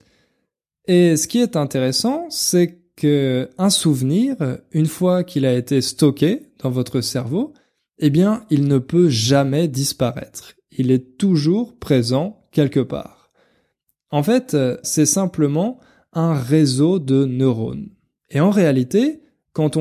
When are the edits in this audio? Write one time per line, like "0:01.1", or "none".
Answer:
0:14.8
0:18.2